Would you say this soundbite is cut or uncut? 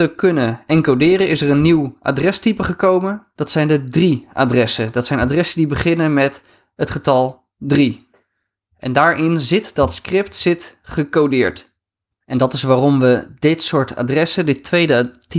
uncut